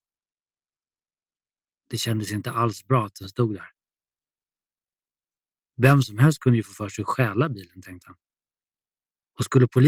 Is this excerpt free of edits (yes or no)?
yes